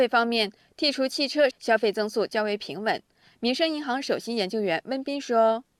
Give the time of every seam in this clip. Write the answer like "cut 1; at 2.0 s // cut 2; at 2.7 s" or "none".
cut 1; at 1.5 s // cut 2; at 3.3 s

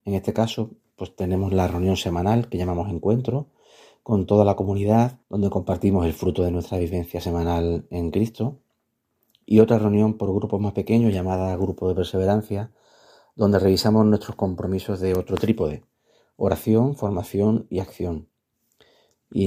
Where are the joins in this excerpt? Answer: cut 1; at 5.2 s

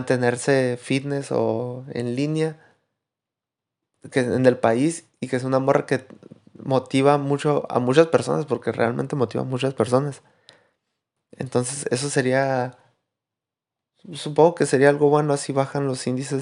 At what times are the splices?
none

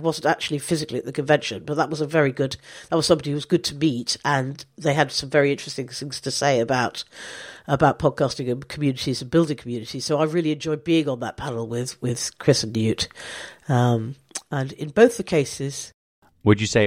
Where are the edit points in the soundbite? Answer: none

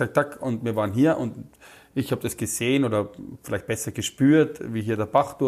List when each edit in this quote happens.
none

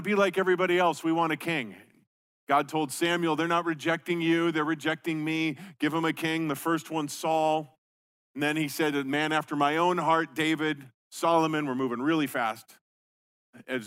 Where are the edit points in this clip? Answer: none

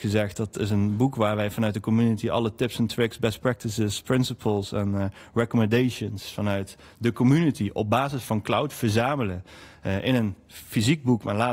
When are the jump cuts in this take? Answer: none

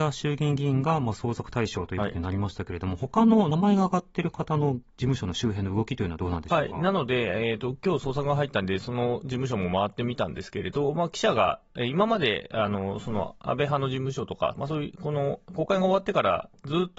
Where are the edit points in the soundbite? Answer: none

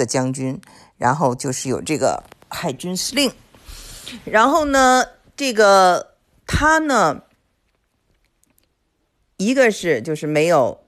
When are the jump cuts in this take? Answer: none

